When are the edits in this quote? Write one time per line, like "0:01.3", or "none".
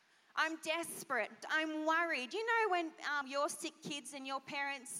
0:01.4
0:03.2